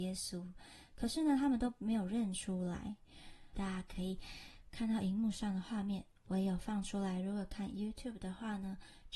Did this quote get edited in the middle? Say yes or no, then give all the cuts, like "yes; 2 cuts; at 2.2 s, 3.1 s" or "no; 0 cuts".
yes; 1 cut; at 3.5 s